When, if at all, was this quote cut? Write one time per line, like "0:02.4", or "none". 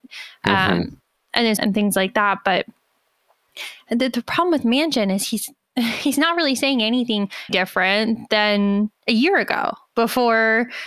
0:01.6
0:07.5

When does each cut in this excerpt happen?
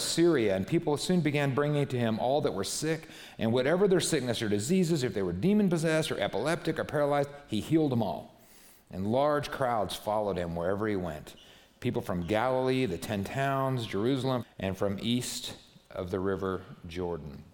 0:14.4

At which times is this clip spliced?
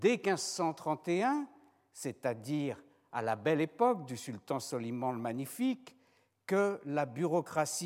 none

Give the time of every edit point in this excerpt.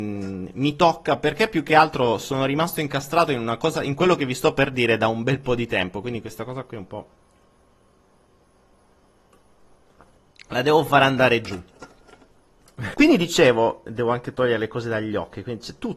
0:12.9

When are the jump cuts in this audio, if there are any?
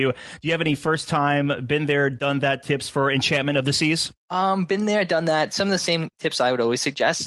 none

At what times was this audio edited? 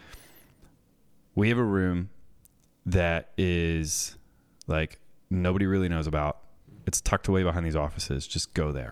none

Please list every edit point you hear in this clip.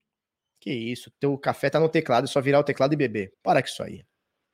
0:01.1
0:03.3

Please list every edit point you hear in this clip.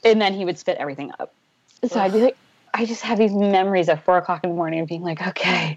0:02.7

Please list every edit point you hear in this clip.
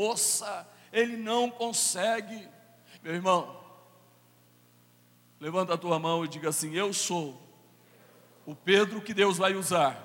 0:03.0

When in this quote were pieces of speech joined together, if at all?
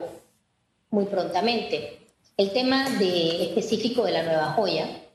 none

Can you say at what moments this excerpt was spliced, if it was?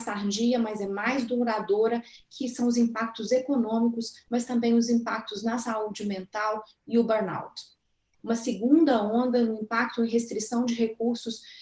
0:08.1

